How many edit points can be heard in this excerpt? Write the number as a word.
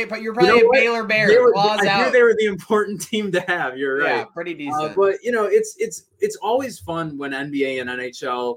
zero